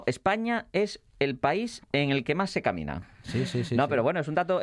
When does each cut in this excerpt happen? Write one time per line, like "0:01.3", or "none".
0:03.2